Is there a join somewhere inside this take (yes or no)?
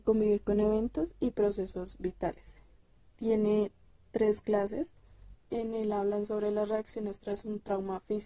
yes